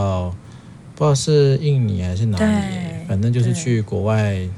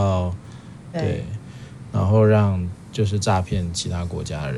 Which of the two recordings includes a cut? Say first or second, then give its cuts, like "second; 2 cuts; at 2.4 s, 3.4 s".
second; 1 cut; at 0.9 s